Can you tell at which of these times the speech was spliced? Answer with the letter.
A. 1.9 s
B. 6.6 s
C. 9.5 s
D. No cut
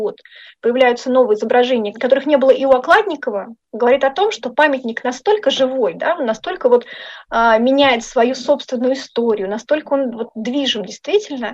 A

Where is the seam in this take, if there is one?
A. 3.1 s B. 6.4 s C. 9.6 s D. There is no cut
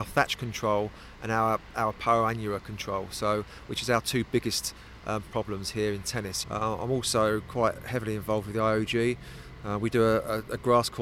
B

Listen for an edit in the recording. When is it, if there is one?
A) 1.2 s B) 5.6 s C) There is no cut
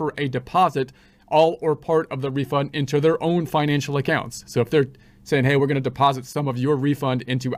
C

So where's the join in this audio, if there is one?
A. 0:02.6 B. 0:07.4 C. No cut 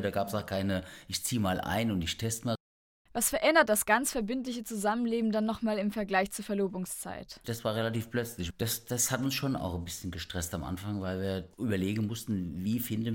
B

